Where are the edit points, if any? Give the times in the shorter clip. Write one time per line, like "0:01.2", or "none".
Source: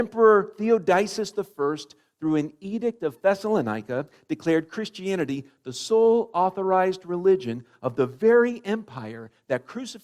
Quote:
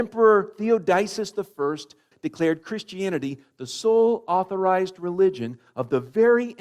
0:02.1

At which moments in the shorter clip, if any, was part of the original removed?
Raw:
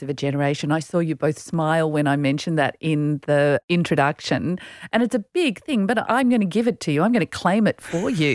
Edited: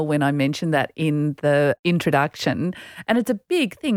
none

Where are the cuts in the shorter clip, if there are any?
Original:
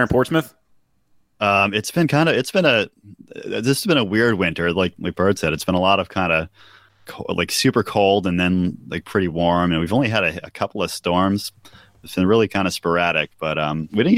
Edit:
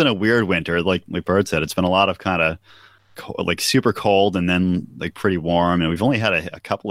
none

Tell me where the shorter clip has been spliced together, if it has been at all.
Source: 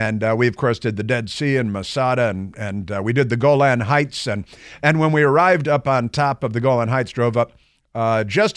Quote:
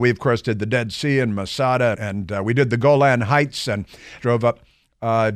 0:01.9
0:04.2

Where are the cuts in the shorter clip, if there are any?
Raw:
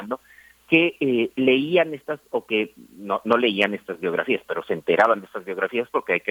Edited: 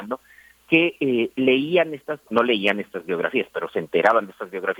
0:02.3

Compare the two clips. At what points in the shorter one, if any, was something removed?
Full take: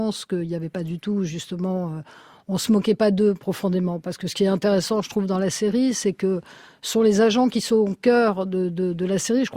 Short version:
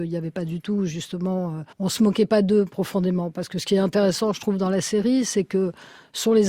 0:01.7

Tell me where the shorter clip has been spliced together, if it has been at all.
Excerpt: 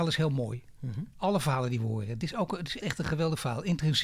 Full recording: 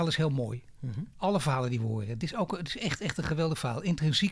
0:02.8

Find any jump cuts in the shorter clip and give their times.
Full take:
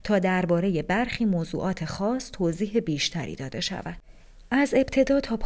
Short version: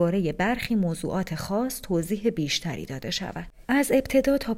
0:03.6

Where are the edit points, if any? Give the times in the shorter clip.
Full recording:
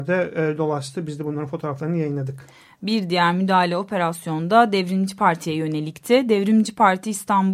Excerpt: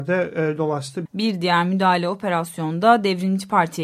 0:01.1

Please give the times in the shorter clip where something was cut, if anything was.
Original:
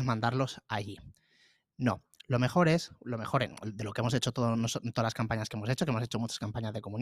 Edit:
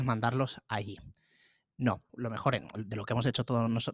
0:02.1

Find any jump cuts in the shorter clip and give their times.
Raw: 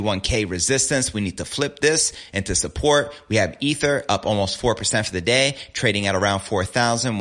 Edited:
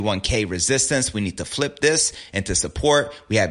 none

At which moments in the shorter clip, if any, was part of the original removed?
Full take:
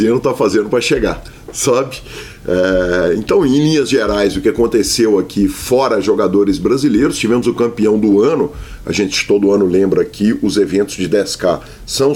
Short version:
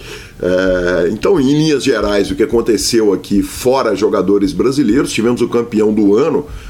none

